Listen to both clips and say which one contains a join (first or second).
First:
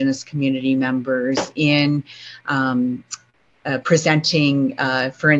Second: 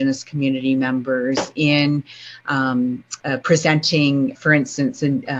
second